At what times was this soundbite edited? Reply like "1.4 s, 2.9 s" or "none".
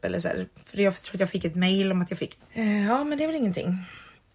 2.4 s